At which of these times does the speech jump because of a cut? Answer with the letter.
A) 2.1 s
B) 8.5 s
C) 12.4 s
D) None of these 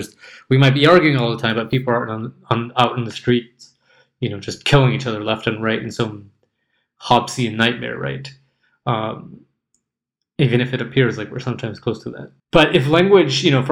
C